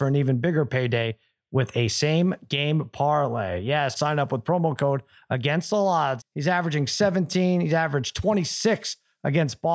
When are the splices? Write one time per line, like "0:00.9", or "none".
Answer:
0:04.0
0:06.2